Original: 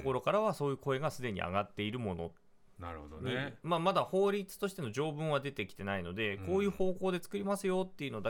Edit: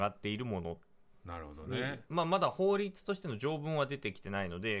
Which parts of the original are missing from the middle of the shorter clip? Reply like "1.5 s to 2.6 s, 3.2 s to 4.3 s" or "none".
none